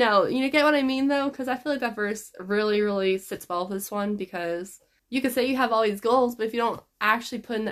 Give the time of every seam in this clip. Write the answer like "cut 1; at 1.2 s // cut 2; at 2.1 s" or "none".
cut 1; at 5.0 s

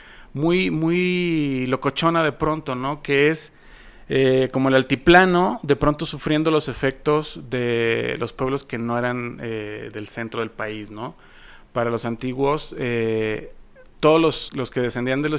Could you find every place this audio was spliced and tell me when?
cut 1; at 14.5 s

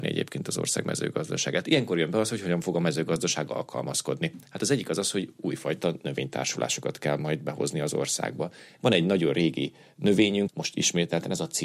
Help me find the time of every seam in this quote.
cut 1; at 8.8 s // cut 2; at 10.5 s

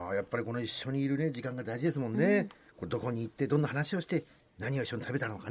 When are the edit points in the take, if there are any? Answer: none

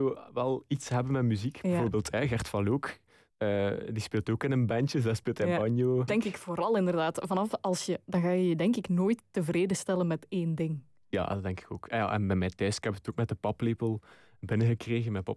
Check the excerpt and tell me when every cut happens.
cut 1; at 3.3 s // cut 2; at 6.1 s // cut 3; at 8.1 s

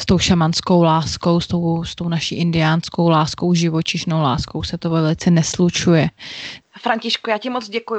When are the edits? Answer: cut 1; at 6.6 s

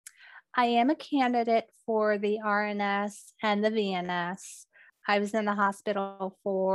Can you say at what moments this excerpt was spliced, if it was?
cut 1; at 4.9 s

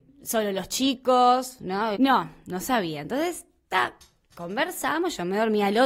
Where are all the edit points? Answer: cut 1; at 2.0 s

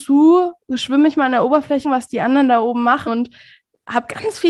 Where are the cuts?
cut 1; at 1.8 s // cut 2; at 3.1 s

